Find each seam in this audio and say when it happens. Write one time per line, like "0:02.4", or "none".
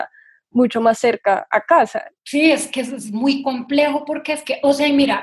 0:02.2